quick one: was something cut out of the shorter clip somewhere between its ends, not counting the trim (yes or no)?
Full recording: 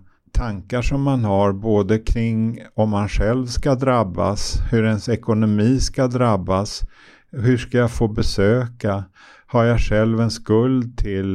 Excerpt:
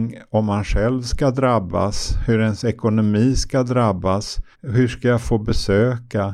yes